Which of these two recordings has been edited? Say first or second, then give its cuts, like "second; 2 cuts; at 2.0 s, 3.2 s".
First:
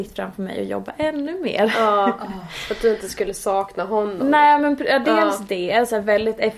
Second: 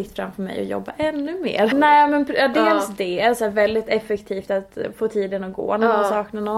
second; 1 cut; at 1.7 s